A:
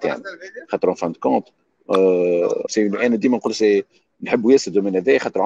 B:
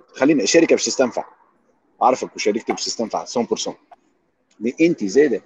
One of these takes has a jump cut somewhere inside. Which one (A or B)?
A